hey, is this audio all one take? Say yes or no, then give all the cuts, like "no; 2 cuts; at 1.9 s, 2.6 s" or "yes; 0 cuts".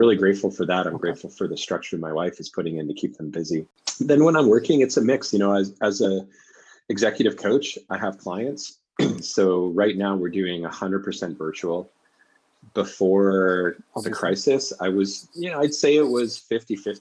yes; 0 cuts